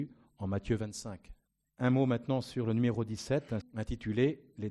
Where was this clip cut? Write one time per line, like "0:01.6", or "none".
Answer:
0:01.6
0:03.6